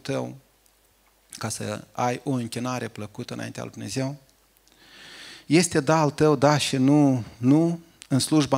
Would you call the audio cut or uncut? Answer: uncut